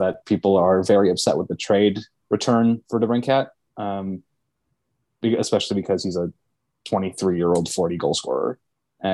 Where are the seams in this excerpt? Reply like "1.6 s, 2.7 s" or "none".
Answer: none